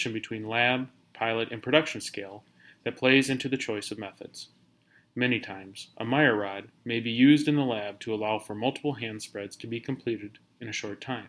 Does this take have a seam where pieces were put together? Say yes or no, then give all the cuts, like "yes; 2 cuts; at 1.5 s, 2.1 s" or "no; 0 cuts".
no; 0 cuts